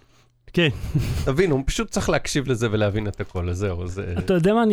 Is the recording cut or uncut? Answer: uncut